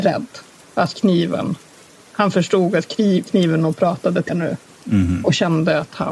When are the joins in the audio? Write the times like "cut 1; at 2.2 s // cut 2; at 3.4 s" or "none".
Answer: cut 1; at 4.3 s